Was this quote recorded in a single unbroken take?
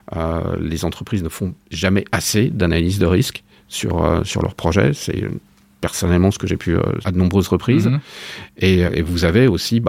no; 2 cuts; at 7.0 s, 8.9 s

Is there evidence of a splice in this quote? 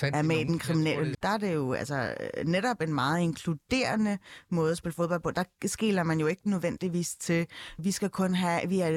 yes; 2 cuts; at 1.1 s, 7.8 s

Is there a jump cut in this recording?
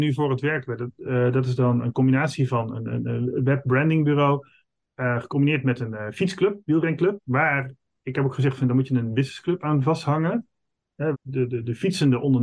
yes; 2 cuts; at 7.2 s, 11.1 s

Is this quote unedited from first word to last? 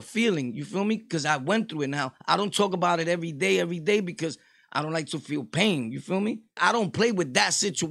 no; 1 cut; at 6.6 s

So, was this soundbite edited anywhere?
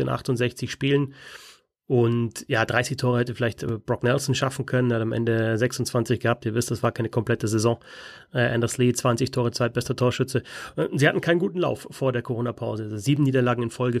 no; 0 cuts

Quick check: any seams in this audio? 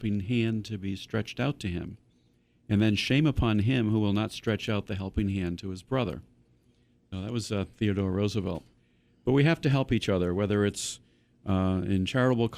no; 0 cuts

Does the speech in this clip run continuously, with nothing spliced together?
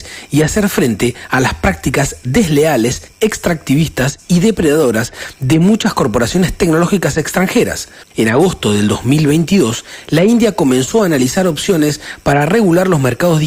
no; 1 cut; at 8.0 s

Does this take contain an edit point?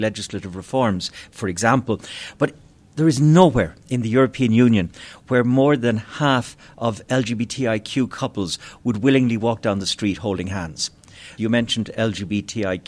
yes; 1 cut; at 11.4 s

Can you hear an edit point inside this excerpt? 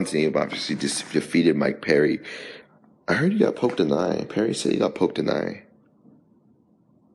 no; 0 cuts

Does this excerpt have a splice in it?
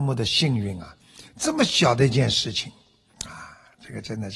yes; 1 cut; at 3.1 s

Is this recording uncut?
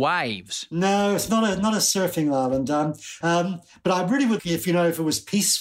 no; 2 cuts; at 3.2 s, 4.4 s

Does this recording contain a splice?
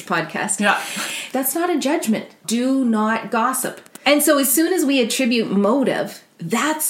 yes; 3 cuts; at 1.3 s, 2.4 s, 4.0 s

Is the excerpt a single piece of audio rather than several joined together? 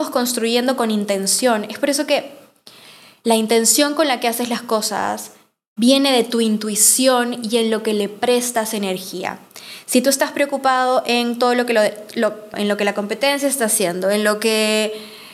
no; 1 cut; at 12.5 s

